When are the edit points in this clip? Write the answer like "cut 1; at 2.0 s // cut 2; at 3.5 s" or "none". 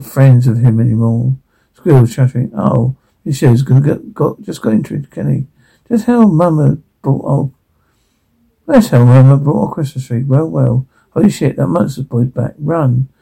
none